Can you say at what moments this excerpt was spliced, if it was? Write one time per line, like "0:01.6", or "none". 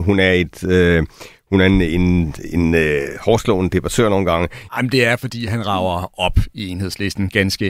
0:04.7